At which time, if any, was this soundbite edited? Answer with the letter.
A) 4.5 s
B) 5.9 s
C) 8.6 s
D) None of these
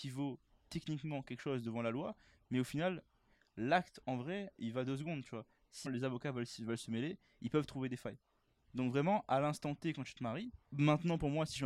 B